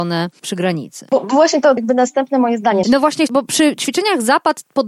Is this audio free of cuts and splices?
no; 2 cuts; at 1.8 s, 2.8 s

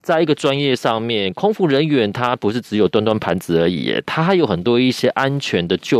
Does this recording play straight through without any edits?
yes; 0 cuts

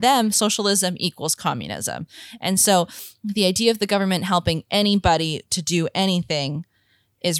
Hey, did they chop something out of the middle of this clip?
no; 0 cuts

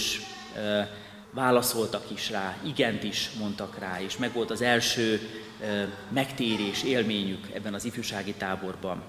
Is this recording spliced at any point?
yes; 1 cut; at 1.2 s

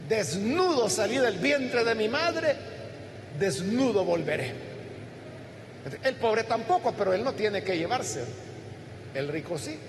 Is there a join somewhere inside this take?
yes; 1 cut; at 6.0 s

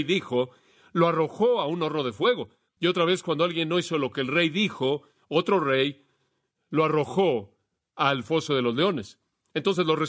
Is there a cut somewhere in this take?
no; 0 cuts

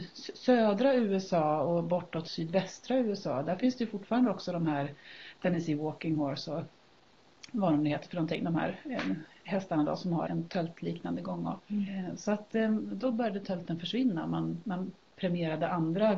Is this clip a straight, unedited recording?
no; 2 cuts; at 10.3 s, 11.6 s

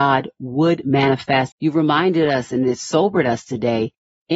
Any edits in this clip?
yes; 1 cut; at 1.5 s

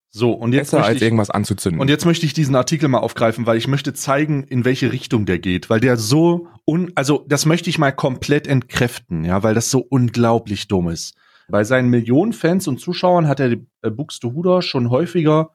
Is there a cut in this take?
yes; 1 cut; at 11.5 s

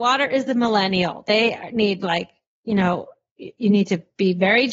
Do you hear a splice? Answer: no; 0 cuts

